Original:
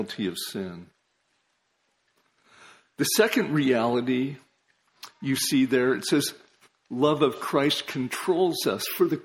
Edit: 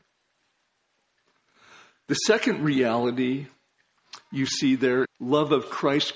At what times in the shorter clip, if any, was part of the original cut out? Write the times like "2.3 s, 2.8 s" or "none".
5.0 s